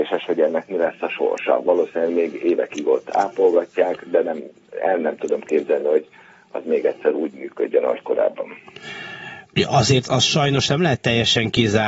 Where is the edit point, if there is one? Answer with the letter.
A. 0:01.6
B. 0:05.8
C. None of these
C